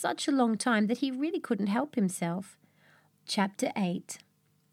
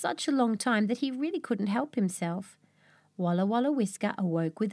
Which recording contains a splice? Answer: first; 1 cut; at 3.1 s

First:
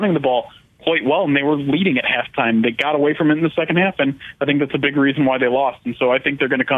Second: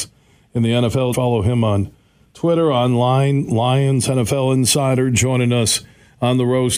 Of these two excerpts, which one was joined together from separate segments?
second; 1 cut; at 1.1 s

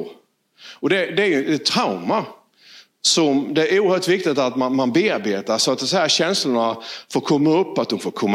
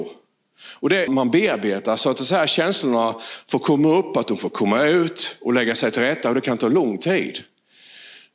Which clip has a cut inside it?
second; 1 cut; at 1.1 s

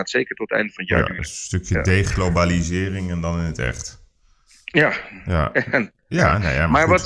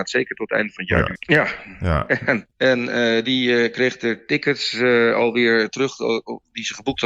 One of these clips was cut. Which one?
second; 2 cuts; at 1.2 s, 2.5 s

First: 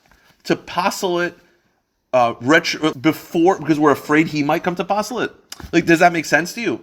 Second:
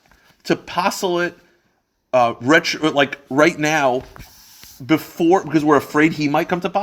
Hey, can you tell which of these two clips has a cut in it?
first; 1 cut; at 2.9 s

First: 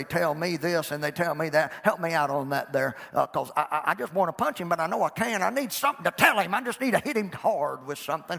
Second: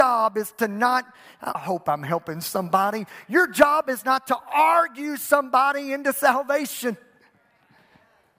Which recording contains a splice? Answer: second; 1 cut; at 1.5 s

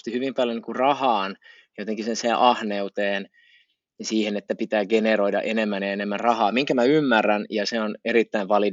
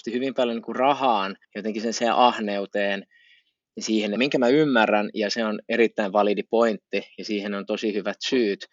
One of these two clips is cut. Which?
second; 2 cuts; at 1.4 s, 4.2 s

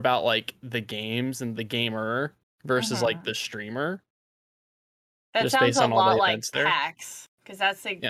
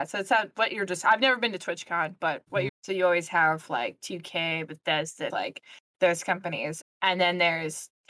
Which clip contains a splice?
second; 3 cuts; at 2.7 s, 5.3 s, 6.8 s

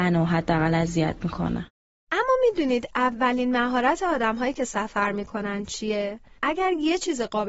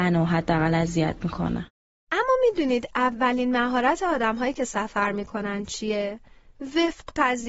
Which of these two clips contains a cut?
first; 1 cut; at 6.4 s

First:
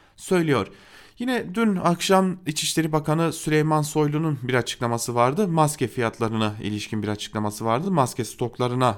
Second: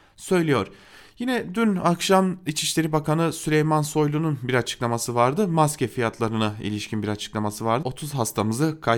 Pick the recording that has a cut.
second; 1 cut; at 7.8 s

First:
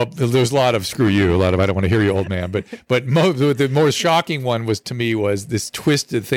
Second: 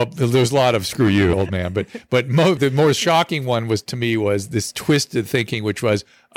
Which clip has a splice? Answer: second; 2 cuts; at 1.3 s, 2.6 s

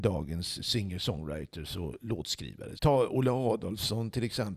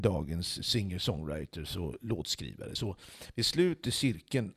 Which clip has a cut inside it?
first; 1 cut; at 2.8 s

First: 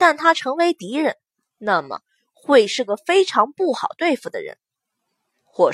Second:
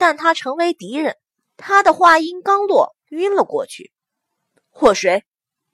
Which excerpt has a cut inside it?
second; 2 cuts; at 1.4 s, 3.0 s

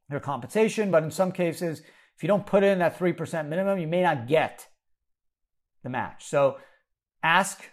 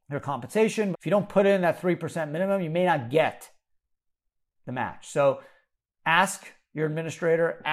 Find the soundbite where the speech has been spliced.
second; 1 cut; at 0.9 s

